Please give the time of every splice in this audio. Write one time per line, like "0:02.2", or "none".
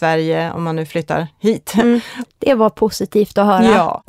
0:02.2